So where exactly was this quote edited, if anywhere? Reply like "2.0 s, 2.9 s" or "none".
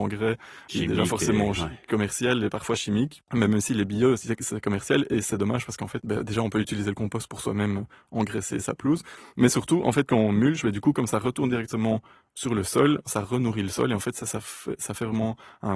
none

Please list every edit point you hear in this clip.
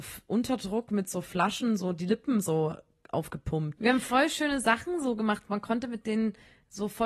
3.8 s

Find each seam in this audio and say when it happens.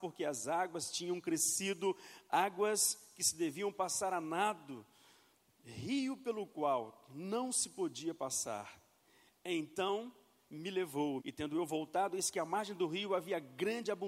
9.3 s, 11.2 s

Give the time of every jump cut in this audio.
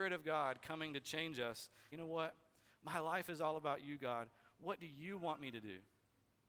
1.9 s

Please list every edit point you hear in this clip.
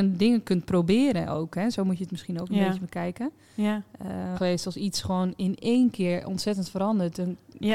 4.4 s

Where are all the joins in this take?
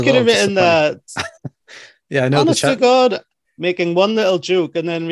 1.4 s, 3.4 s

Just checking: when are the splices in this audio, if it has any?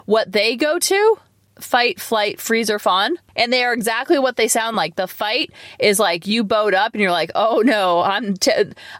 none

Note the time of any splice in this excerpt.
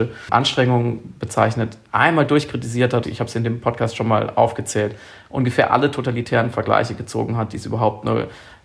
3.0 s

